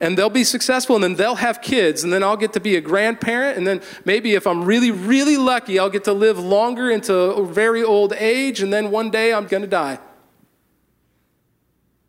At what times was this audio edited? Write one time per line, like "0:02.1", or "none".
0:04.9
0:09.5